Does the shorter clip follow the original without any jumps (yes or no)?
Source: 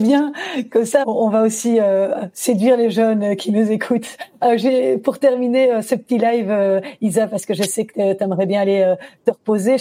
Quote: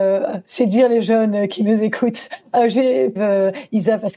no